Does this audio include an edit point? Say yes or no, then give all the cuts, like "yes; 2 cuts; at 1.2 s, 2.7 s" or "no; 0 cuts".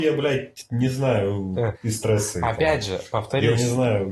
yes; 1 cut; at 1.8 s